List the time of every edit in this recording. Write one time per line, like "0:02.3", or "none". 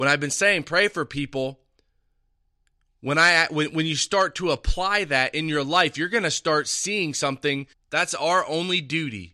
0:07.7